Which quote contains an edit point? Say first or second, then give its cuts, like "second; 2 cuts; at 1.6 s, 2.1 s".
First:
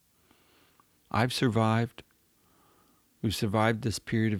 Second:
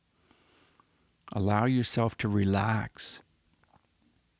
first; 1 cut; at 1.0 s